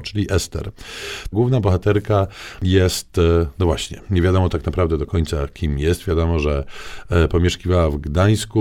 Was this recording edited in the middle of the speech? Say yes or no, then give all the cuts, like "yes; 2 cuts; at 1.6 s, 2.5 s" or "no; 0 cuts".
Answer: yes; 1 cut; at 1.3 s